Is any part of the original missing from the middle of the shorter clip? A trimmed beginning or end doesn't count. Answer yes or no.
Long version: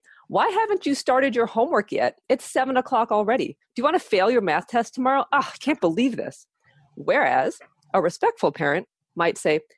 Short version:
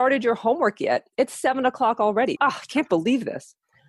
yes